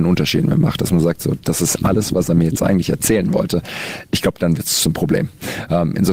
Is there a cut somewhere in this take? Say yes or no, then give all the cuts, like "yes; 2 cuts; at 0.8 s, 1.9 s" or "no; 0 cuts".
no; 0 cuts